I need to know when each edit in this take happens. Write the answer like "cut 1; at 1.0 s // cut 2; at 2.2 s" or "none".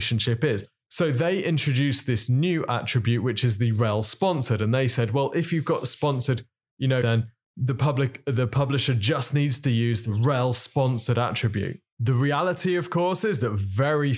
cut 1; at 7.0 s